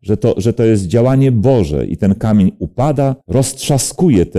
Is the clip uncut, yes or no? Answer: no